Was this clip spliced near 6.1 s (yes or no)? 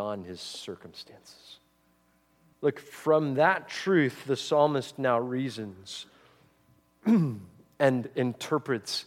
no